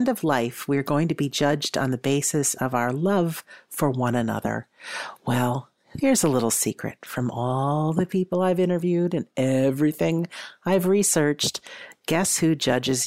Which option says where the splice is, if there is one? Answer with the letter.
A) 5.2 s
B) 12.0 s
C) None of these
C